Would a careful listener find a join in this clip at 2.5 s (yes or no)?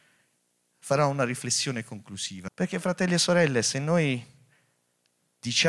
yes